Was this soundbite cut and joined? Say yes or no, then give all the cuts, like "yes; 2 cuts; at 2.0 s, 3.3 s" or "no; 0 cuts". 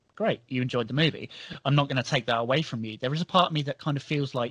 no; 0 cuts